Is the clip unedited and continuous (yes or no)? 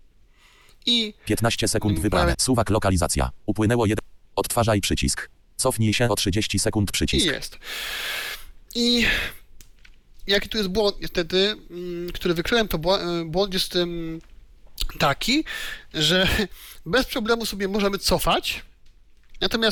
no